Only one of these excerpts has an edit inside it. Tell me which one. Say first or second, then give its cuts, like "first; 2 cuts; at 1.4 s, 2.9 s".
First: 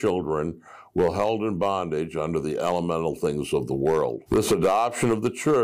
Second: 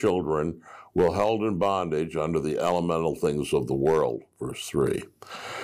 first; 1 cut; at 4.3 s